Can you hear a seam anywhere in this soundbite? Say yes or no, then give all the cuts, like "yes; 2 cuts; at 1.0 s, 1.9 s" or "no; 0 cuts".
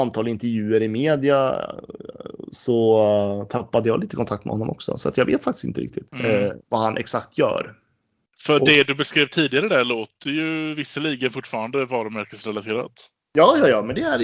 yes; 1 cut; at 6.1 s